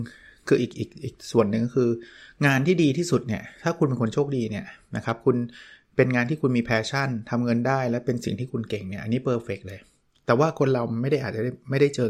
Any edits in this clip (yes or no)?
no